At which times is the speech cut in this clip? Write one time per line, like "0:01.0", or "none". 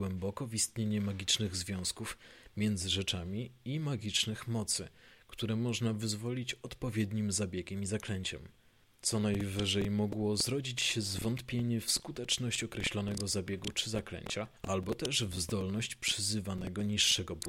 0:08.8
0:14.6